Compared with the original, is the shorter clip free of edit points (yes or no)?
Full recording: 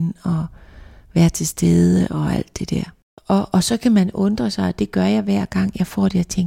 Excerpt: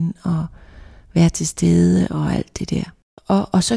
yes